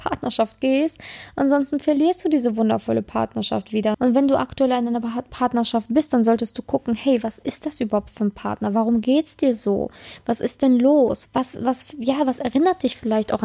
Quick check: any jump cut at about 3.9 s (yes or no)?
yes